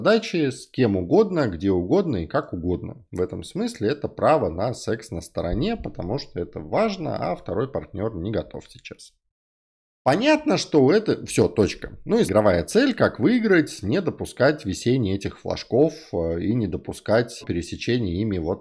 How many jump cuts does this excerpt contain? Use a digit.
2